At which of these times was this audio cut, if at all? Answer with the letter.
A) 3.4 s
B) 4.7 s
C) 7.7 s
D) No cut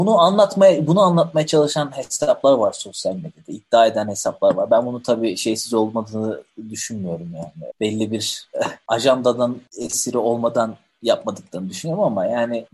C